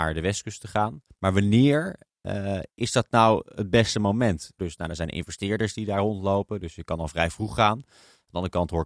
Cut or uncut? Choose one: cut